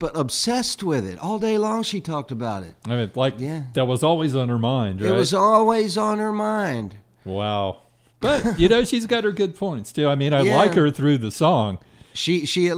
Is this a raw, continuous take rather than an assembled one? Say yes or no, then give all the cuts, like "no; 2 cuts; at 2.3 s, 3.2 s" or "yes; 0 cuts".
no; 1 cut; at 8.1 s